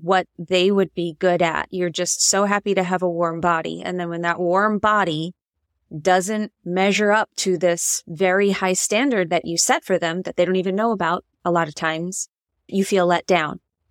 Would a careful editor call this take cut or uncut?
uncut